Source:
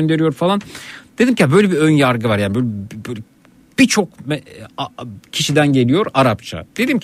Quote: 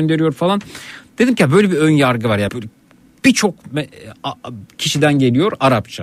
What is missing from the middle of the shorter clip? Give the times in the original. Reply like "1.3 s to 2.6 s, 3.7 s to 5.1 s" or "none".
2.5 s to 3.0 s